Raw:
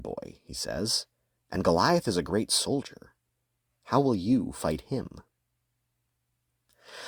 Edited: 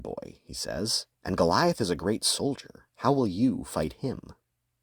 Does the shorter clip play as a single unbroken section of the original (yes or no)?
no